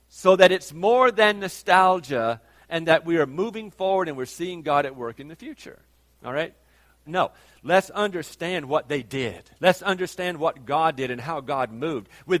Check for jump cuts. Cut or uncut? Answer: cut